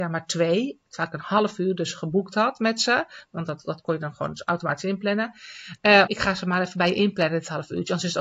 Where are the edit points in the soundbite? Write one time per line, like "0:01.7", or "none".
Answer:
0:06.1